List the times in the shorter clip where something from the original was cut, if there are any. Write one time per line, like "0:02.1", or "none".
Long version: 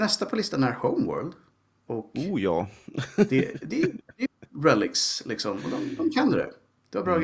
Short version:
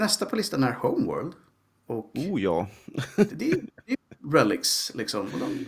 0:03.3